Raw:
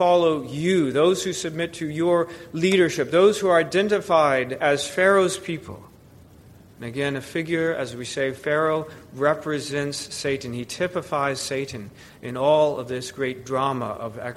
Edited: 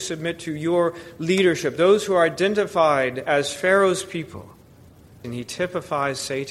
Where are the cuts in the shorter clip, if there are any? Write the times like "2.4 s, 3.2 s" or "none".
5.2 s